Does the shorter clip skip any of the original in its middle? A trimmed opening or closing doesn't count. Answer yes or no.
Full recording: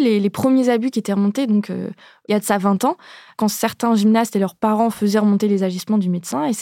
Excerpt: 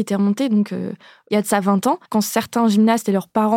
yes